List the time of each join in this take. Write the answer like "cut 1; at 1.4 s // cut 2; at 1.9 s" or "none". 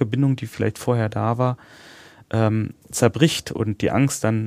none